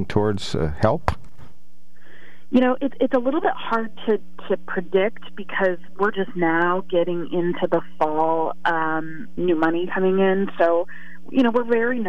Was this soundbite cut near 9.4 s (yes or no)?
yes